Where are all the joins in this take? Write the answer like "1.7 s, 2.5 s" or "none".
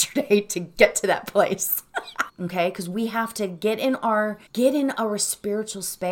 2.3 s, 4.5 s